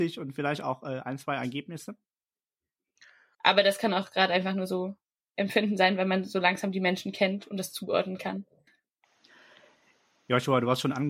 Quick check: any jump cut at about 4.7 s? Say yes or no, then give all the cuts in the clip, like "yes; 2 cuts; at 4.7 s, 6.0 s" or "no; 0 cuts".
no; 2 cuts; at 3.3 s, 8.7 s